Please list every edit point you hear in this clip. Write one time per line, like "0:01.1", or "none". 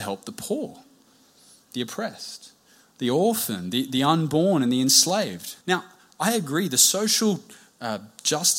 0:05.6